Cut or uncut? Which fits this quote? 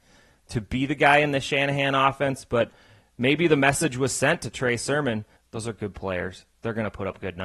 cut